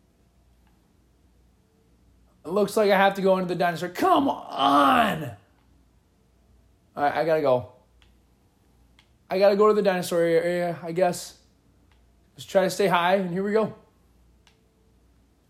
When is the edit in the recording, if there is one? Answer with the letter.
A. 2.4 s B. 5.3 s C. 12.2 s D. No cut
A